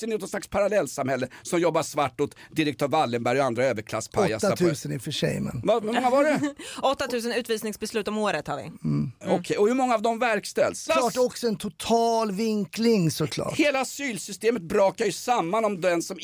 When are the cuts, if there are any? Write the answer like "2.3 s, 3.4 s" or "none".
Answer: 10.9 s